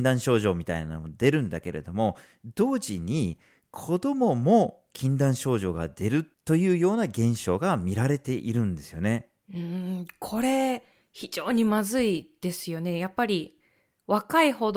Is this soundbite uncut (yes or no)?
yes